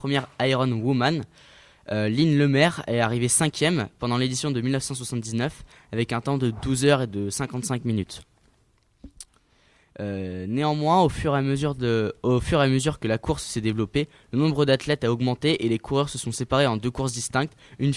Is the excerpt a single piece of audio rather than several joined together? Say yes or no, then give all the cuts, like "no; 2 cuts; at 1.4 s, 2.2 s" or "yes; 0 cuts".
yes; 0 cuts